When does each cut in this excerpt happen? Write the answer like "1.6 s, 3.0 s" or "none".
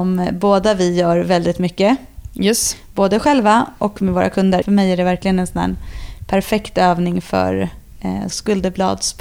4.6 s, 8.3 s

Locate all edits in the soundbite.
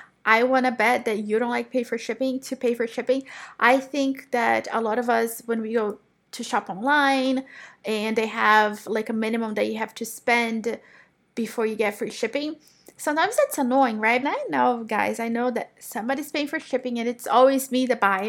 14.2 s

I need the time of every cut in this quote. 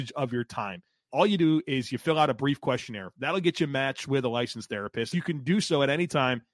1.1 s, 5.1 s

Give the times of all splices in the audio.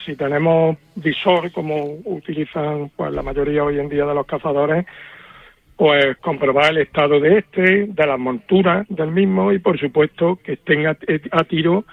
none

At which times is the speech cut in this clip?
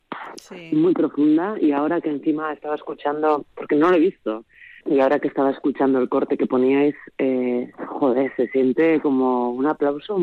4.8 s

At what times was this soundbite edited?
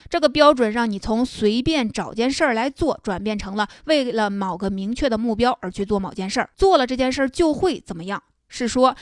6.5 s

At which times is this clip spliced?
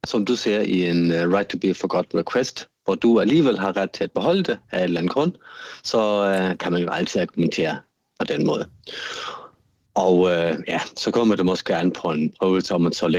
none

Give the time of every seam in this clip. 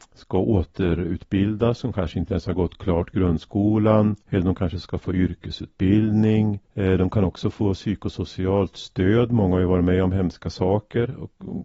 4.2 s, 6.6 s

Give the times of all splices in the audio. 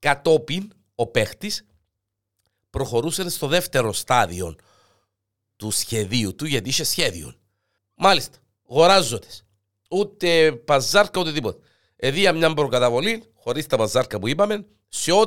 7.8 s

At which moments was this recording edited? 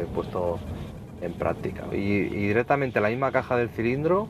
1.9 s

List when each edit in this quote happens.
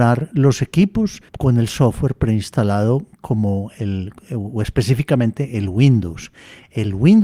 1.3 s, 3.1 s

